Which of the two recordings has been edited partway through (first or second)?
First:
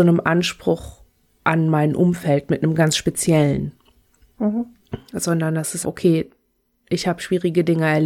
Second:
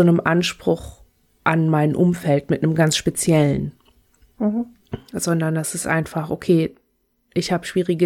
first